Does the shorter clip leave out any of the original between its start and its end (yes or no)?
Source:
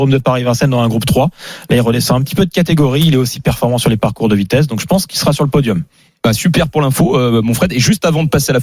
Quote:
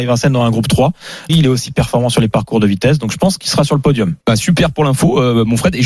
yes